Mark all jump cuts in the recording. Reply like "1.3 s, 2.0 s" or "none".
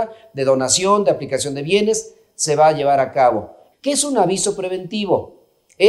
3.7 s